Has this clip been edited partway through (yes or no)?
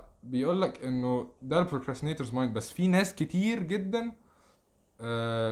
no